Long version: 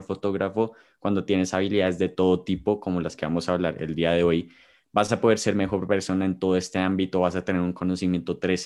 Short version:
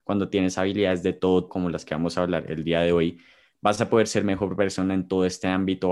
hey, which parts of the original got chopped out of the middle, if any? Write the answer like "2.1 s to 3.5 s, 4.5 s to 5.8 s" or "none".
2.4 s to 2.8 s